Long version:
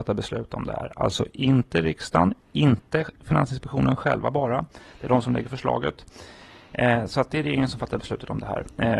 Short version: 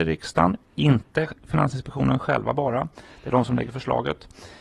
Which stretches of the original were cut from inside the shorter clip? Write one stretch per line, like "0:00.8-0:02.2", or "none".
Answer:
none

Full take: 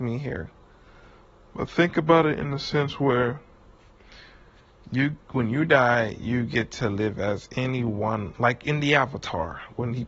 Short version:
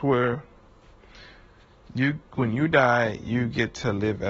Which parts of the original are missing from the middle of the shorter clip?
none

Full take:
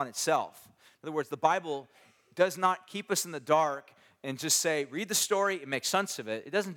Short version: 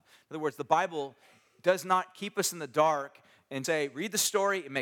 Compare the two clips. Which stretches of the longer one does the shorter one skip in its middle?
0:04.4-0:04.6

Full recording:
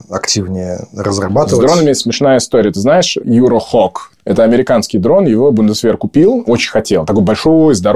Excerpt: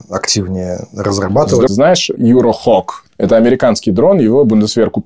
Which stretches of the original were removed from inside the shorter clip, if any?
0:01.7-0:02.7

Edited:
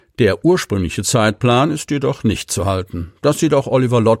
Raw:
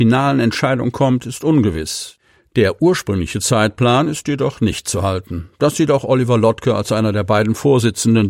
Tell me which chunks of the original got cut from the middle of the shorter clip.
none

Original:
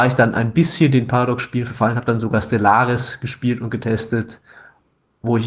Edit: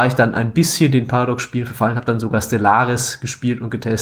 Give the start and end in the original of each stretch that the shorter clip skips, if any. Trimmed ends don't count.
none

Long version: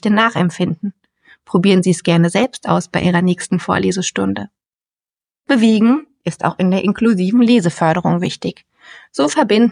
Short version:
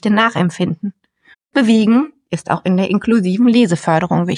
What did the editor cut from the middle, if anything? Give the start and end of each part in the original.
0:01.3-0:05.3

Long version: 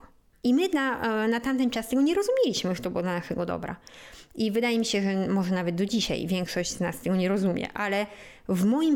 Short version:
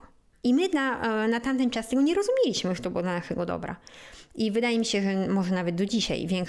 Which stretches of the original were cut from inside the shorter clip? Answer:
none

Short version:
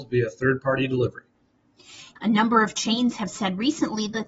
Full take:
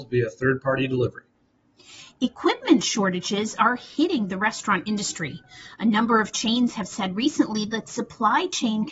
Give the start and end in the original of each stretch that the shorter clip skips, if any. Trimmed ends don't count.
0:02.2-0:05.7

